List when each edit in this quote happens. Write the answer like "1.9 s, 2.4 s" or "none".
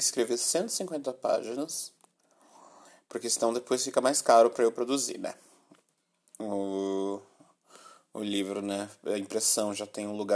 none